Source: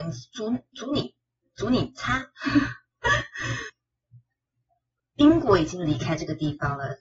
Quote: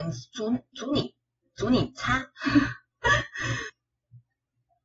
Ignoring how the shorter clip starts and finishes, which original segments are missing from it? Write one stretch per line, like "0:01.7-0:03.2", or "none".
none

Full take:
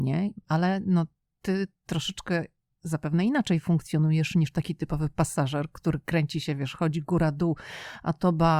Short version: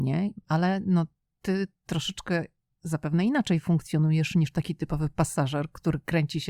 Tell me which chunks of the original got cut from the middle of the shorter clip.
none

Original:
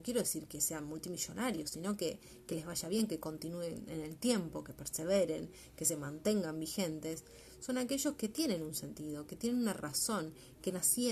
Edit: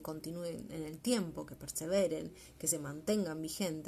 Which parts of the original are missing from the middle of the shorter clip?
none

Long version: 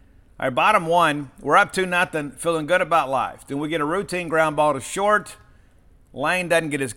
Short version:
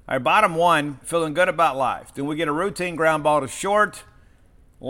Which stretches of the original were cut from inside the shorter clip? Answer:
0:01.3-0:02.3

